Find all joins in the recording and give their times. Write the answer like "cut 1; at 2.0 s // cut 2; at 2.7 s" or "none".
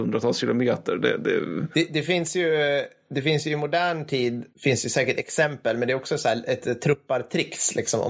cut 1; at 6.6 s

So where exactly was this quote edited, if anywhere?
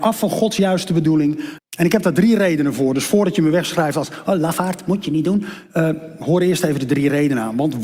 cut 1; at 1.6 s

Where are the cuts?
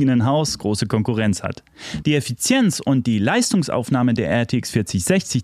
cut 1; at 2.0 s

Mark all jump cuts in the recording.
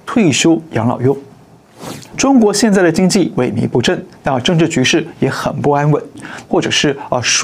cut 1; at 2.1 s // cut 2; at 6.4 s

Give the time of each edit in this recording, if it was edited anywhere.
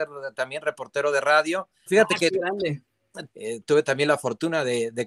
cut 1; at 1.9 s // cut 2; at 3.3 s

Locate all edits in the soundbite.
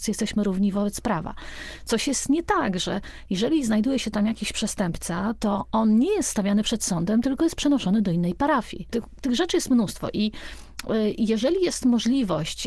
cut 1; at 8.9 s

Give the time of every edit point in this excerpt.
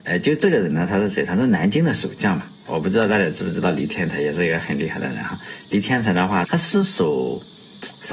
cut 1; at 2.7 s // cut 2; at 6.4 s

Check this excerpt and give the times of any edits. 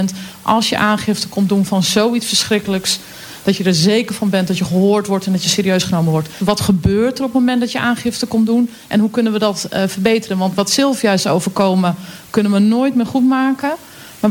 cut 1; at 6.4 s

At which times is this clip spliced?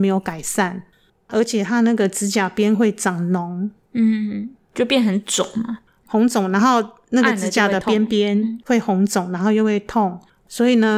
none

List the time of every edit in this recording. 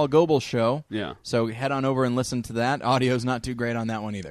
none

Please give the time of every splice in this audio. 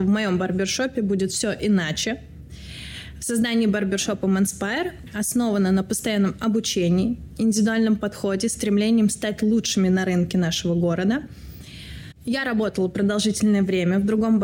cut 1; at 12.1 s

